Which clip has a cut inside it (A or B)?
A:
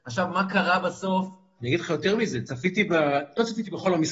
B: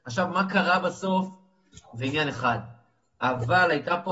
A